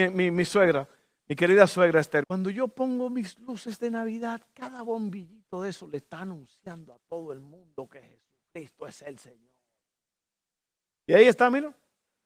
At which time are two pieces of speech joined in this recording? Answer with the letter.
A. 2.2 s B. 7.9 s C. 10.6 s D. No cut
A